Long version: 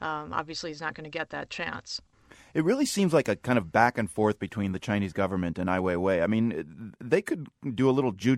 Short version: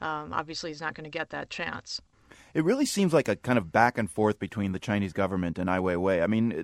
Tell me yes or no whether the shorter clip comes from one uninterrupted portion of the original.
yes